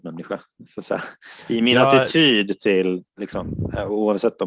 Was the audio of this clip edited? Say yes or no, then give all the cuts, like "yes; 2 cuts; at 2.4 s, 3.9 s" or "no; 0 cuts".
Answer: yes; 1 cut; at 3.1 s